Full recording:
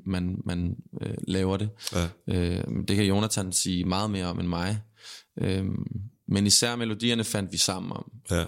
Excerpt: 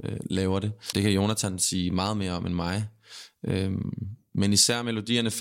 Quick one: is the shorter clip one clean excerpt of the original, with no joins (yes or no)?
no